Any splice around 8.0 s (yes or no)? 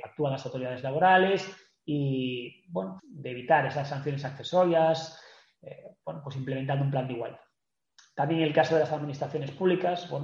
no